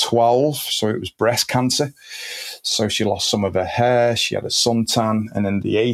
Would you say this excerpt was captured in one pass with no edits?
yes; 0 cuts

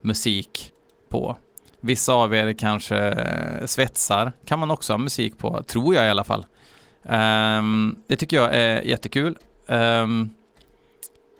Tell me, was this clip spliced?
no; 0 cuts

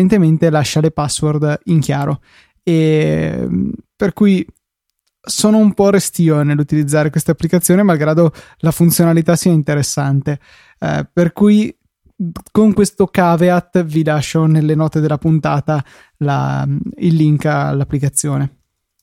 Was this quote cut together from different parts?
no; 0 cuts

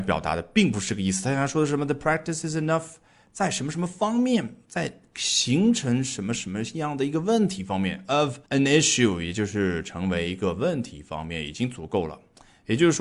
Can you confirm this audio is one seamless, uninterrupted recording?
no; 1 cut; at 8.5 s

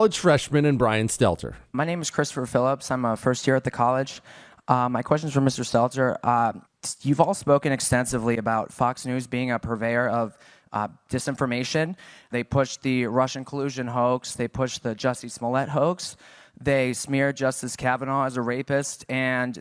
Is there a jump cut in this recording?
yes; 1 cut; at 12.3 s

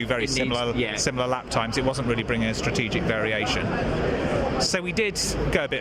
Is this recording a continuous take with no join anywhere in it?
yes; 0 cuts

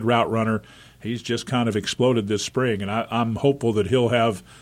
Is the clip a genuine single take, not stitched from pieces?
yes; 0 cuts

